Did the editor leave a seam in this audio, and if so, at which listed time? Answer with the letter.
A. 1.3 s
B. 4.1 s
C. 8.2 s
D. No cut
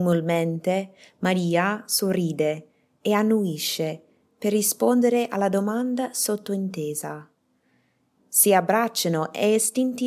C